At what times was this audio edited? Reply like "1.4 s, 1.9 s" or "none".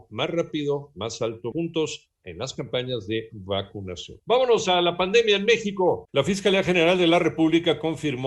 1.5 s, 4.2 s, 6.1 s